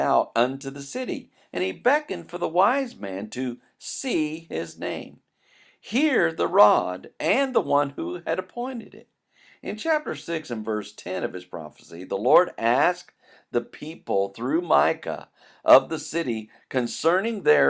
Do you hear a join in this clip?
no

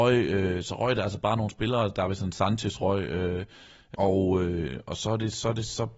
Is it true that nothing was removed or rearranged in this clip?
no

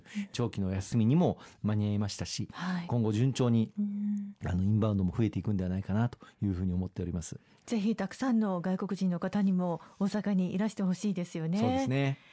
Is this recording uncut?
yes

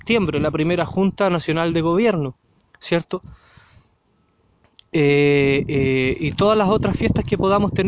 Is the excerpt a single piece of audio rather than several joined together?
yes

